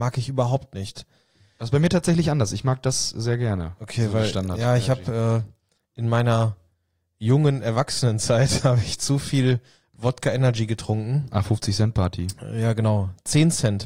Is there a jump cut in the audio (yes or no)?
no